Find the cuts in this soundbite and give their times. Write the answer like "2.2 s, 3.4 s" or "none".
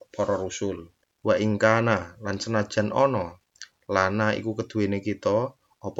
1.0 s